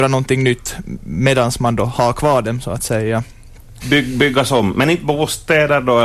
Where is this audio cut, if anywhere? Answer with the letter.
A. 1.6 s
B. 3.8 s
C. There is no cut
B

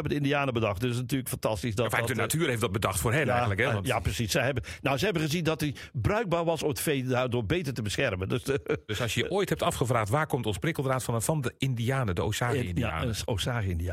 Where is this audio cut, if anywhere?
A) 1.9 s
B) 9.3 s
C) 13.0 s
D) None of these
D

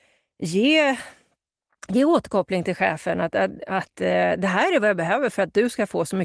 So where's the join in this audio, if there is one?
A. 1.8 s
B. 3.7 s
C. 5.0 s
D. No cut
D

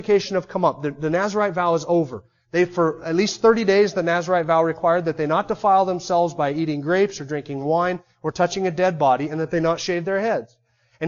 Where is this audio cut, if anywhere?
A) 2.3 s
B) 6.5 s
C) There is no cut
C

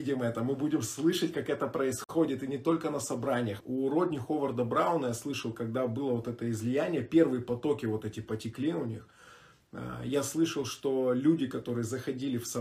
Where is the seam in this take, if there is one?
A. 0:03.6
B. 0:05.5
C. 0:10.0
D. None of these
A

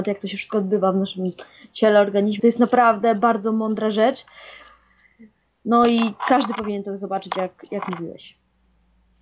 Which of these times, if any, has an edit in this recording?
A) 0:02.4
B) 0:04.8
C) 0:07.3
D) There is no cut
A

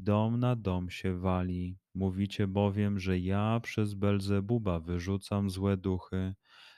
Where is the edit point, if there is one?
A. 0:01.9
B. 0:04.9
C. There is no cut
A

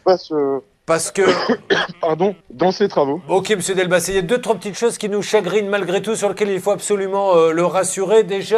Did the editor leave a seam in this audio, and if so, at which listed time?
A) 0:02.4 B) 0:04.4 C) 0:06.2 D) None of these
A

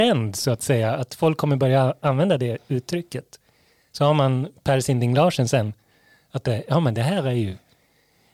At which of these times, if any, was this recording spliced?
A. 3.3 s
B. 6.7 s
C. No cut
C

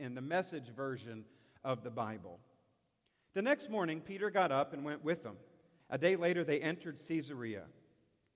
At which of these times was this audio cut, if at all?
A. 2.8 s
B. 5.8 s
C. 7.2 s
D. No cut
B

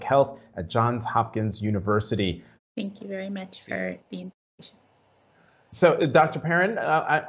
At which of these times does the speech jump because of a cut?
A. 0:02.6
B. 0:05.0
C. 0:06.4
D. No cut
A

